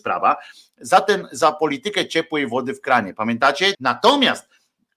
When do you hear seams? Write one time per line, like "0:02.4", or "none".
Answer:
0:03.7